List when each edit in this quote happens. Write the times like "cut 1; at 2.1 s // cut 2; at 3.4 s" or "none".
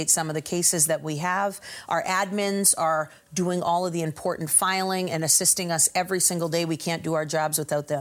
none